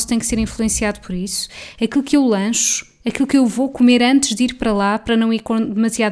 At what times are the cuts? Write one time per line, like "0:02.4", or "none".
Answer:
none

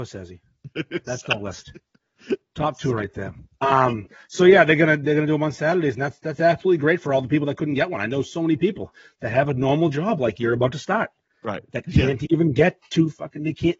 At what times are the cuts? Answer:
none

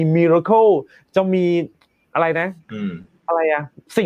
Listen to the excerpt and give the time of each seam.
0:02.6

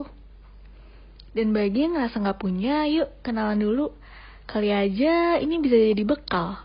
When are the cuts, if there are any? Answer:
none

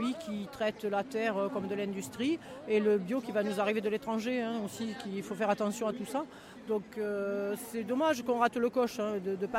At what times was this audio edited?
none

